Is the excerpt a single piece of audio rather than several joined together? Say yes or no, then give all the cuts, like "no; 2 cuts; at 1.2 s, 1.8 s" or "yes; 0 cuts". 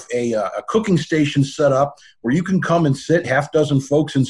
no; 1 cut; at 3.2 s